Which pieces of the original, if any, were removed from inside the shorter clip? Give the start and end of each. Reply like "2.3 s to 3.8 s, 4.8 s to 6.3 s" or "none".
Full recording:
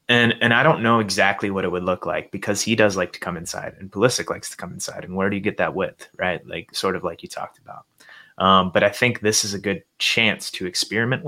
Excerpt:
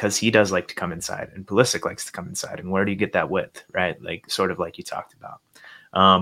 none